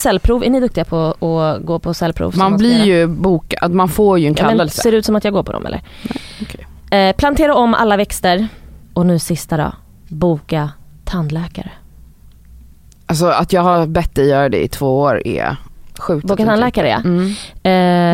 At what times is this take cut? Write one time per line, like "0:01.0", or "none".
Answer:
0:08.8